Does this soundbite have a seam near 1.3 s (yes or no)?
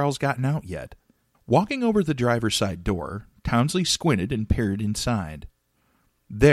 yes